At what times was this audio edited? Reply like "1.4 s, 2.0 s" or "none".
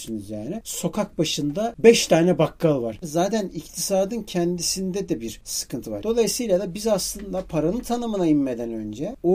3.0 s, 6.0 s